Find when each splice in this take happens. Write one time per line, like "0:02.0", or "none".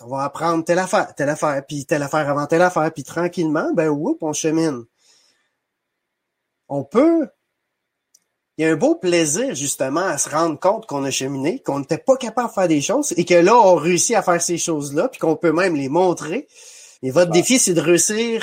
0:17.0

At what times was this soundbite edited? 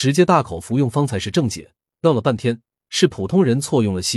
0:01.9

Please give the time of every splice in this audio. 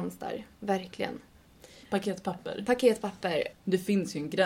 0:01.8
0:03.5

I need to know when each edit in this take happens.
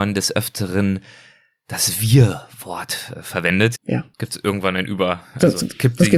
0:03.8

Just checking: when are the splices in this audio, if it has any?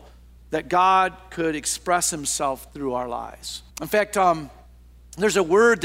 0:03.7

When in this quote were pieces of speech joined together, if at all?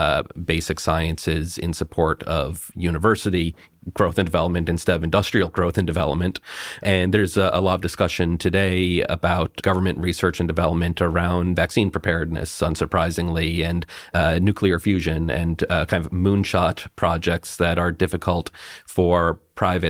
none

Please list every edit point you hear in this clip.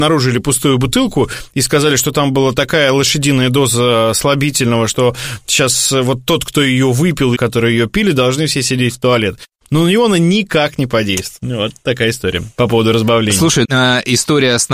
0:07.4
0:13.6

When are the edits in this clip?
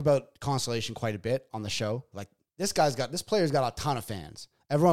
0:02.1

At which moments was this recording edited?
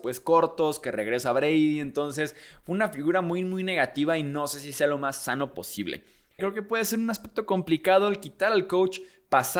0:06.4

